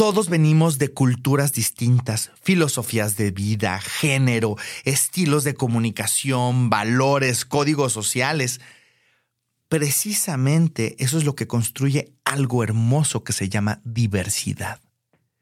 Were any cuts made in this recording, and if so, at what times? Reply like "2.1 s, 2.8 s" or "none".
none